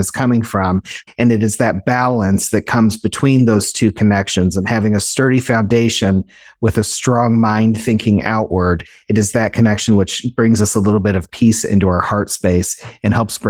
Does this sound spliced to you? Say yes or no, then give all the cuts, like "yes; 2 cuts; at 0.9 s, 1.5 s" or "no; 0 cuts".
yes; 1 cut; at 1.1 s